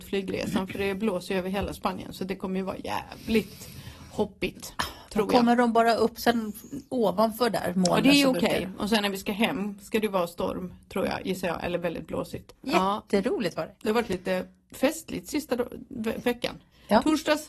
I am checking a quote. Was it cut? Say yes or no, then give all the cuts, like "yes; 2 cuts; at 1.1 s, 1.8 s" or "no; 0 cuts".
yes; 1 cut; at 12.6 s